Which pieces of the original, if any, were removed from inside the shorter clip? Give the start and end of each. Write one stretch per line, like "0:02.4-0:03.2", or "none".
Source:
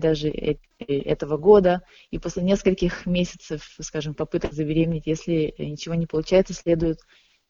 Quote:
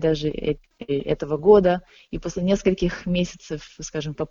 none